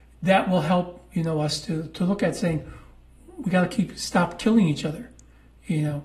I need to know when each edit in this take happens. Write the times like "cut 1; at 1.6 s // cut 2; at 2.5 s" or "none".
none